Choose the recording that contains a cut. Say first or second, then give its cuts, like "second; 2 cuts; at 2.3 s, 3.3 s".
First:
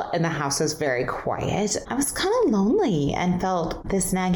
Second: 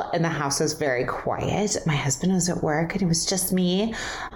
first; 1 cut; at 1.8 s